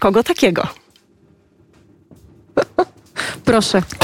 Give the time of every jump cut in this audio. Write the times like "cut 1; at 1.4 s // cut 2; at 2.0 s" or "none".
none